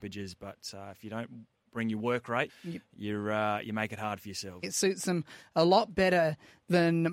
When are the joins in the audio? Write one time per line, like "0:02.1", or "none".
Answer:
0:02.5
0:04.6